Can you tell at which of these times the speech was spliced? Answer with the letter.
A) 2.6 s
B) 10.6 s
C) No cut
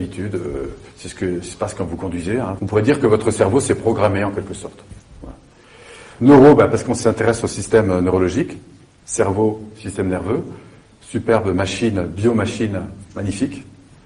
A